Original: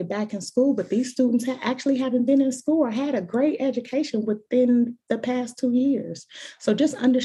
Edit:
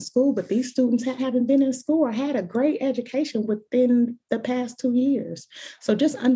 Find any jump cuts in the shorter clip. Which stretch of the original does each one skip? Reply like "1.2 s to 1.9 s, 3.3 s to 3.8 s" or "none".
1.6 s to 2.0 s